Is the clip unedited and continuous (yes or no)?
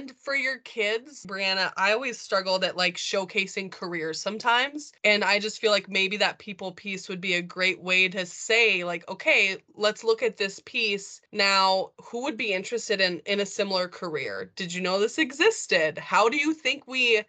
no